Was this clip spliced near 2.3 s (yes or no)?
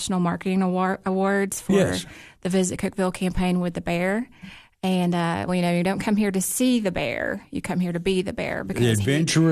no